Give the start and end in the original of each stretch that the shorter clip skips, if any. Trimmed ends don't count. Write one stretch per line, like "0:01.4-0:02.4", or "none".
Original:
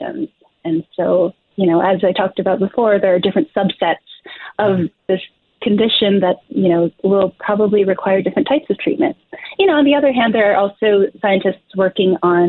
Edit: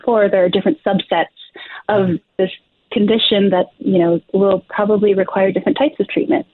none